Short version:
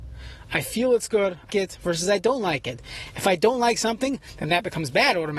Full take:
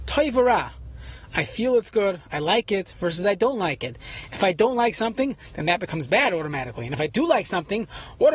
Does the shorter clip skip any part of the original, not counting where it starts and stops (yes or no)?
yes